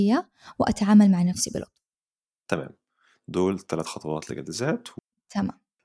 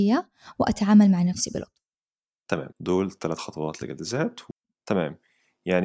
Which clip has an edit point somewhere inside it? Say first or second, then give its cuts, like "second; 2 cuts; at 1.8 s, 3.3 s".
second; 2 cuts; at 2.7 s, 4.7 s